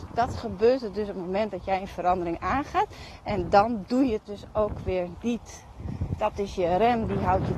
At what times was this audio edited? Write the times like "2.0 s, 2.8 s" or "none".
none